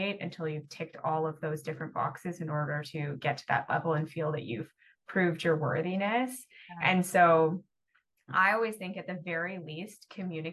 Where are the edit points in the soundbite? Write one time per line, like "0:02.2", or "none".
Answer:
none